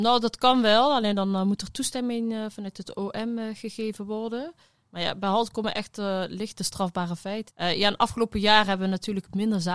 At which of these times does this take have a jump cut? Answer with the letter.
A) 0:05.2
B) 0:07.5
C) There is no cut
B